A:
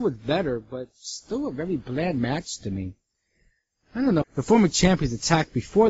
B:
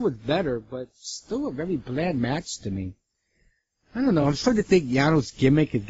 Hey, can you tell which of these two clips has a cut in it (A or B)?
A